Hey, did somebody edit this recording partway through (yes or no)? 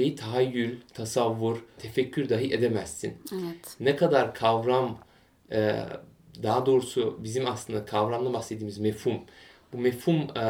yes